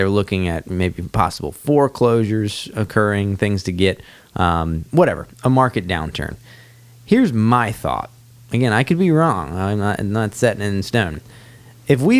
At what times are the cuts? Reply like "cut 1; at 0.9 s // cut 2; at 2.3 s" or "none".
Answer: none

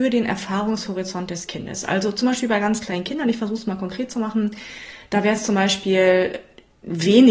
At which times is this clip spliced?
none

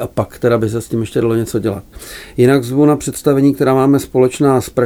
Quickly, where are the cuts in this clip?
none

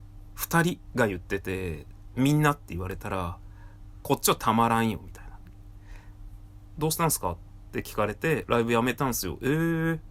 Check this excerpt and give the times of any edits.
cut 1; at 6.8 s // cut 2; at 8.5 s

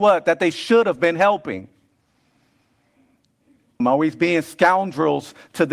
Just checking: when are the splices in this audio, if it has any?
cut 1; at 3.8 s

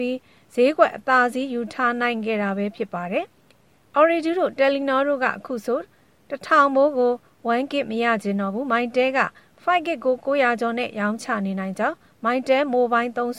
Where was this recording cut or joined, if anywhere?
cut 1; at 3.3 s

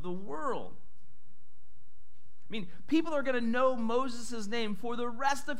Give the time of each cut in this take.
none

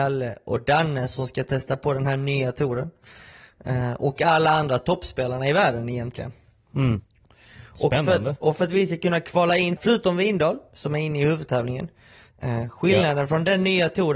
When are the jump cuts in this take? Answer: cut 1; at 9.8 s

